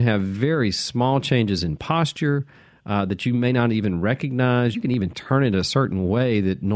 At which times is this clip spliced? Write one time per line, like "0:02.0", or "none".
0:04.7